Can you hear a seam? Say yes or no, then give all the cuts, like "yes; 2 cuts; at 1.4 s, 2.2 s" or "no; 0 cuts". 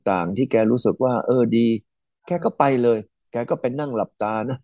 no; 0 cuts